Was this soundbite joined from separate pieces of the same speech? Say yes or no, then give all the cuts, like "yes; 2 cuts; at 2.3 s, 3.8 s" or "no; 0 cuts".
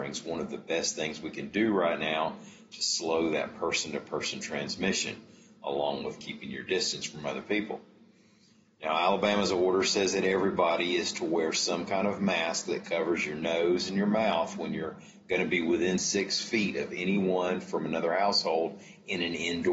no; 0 cuts